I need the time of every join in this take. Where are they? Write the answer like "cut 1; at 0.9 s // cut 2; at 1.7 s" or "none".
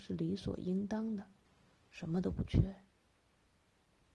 cut 1; at 1.7 s